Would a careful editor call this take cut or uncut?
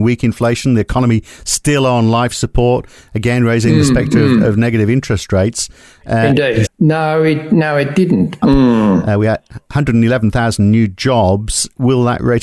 cut